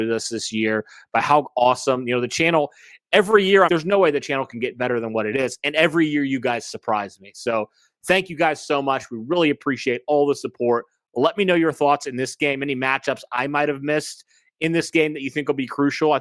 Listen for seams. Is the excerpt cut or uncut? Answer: cut